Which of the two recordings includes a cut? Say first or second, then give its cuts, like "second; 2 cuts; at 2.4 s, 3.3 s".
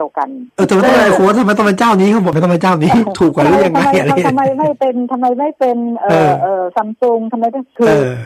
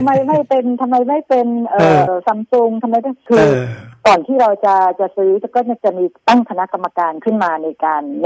second; 1 cut; at 2.1 s